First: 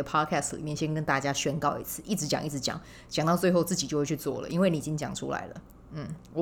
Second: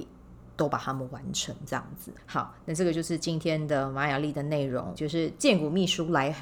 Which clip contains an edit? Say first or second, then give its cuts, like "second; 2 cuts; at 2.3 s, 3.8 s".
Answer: second; 2 cuts; at 2.2 s, 5.0 s